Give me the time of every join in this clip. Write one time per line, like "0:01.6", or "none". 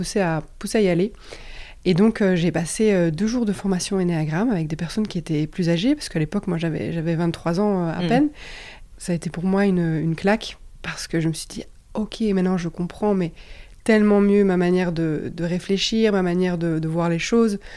0:08.9

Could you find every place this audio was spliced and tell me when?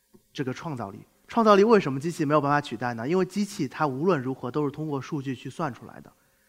none

